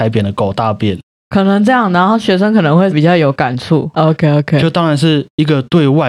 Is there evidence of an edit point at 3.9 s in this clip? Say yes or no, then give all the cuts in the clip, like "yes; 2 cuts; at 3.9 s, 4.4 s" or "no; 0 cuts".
yes; 1 cut; at 3.9 s